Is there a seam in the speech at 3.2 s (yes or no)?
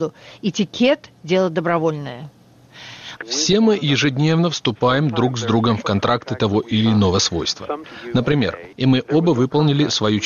yes